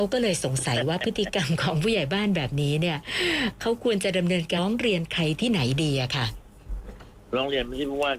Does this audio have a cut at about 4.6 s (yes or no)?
yes